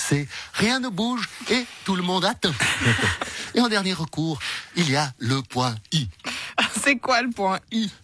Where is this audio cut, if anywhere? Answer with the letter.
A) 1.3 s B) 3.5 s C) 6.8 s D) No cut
D